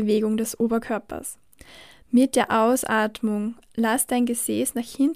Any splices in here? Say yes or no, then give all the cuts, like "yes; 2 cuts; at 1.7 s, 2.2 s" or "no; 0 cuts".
no; 0 cuts